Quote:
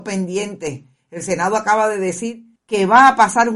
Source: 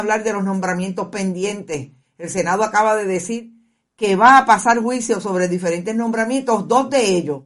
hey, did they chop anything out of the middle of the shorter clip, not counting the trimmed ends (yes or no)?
yes